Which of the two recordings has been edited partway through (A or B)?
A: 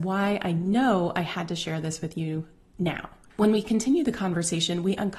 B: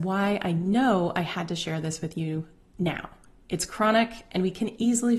A